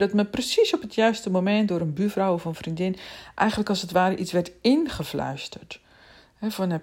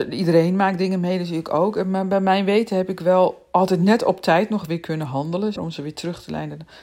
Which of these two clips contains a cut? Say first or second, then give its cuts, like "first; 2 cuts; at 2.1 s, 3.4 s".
second; 1 cut; at 5.6 s